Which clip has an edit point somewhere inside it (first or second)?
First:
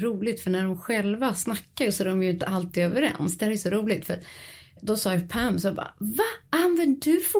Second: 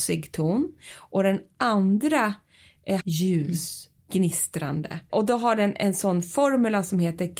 second